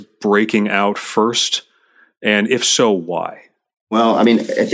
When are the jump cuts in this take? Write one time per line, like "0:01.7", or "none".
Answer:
none